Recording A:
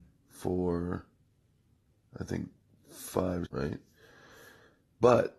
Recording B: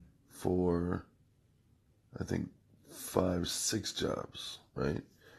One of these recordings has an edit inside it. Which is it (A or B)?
A